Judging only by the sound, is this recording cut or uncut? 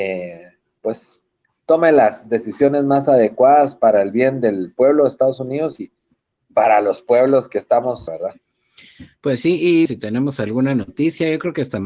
cut